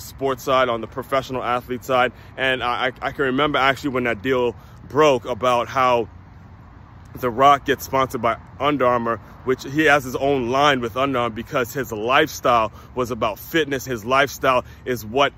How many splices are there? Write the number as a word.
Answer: one